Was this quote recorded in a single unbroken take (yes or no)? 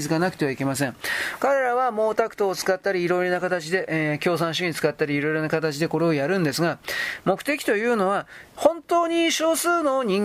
yes